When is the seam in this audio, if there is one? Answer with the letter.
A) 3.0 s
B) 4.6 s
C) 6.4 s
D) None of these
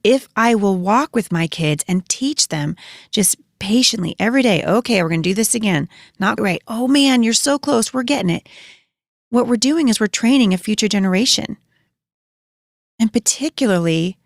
C